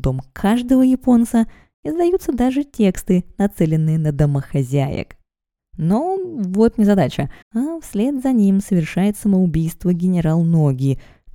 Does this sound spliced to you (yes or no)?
yes